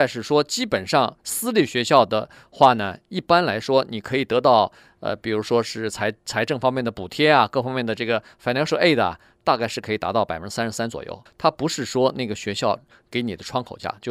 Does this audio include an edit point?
yes; 1 cut; at 11.3 s

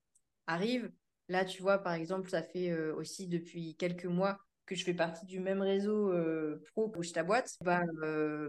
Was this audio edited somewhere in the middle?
no; 0 cuts

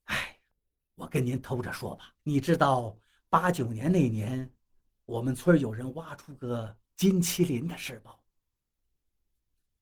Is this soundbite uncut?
no; 1 cut; at 2.2 s

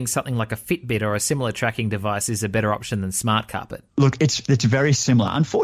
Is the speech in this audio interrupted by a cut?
yes; 1 cut; at 3.9 s

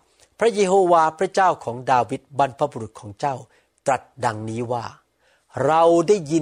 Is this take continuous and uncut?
yes; 0 cuts

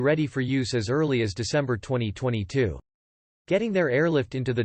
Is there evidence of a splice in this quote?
no; 0 cuts

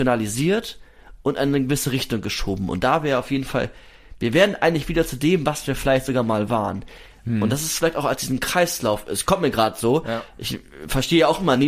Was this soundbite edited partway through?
no; 0 cuts

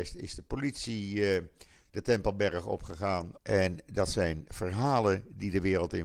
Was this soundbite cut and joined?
yes; 1 cut; at 3.4 s

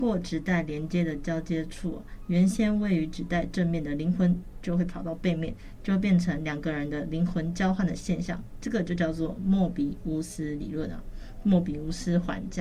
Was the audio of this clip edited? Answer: yes; 1 cut; at 5.8 s

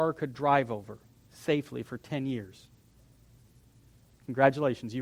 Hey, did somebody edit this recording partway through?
no; 0 cuts

